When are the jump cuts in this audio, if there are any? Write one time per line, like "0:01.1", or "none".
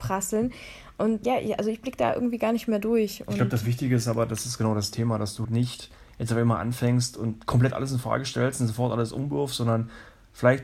0:01.2
0:05.4